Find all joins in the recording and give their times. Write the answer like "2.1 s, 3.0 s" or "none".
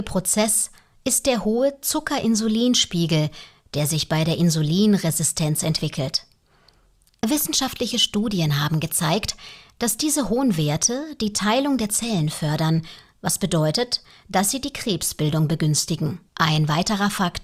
16.3 s